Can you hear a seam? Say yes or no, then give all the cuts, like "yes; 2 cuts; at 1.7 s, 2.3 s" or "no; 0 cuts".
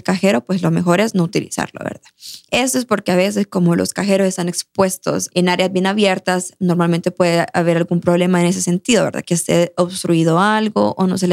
no; 0 cuts